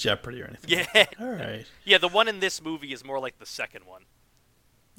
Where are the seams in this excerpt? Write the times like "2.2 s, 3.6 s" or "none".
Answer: 1.1 s